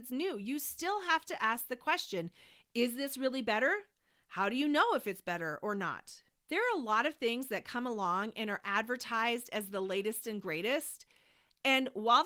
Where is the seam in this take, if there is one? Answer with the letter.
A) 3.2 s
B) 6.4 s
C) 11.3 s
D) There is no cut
B